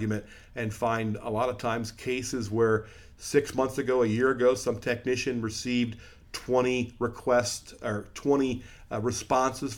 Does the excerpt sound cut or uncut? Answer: uncut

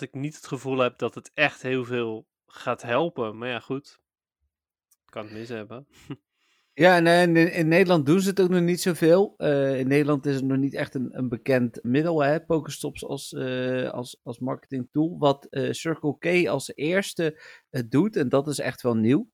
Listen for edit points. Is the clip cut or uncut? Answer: cut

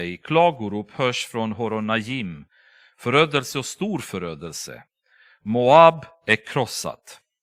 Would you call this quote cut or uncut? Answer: uncut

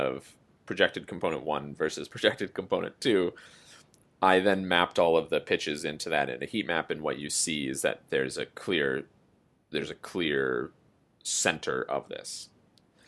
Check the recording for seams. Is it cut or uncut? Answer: uncut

